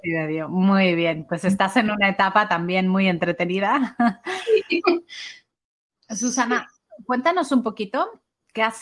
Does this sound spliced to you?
no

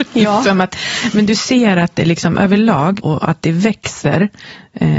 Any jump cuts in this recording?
yes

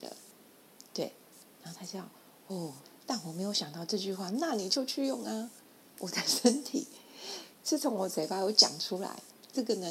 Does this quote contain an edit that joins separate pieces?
yes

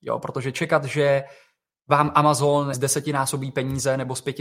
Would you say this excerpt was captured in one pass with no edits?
no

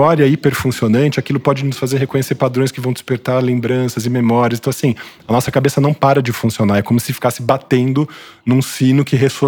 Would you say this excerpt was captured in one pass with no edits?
yes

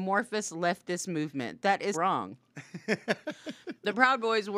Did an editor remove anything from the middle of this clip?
yes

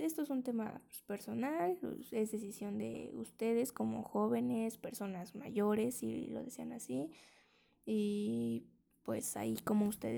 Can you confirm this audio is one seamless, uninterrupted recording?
yes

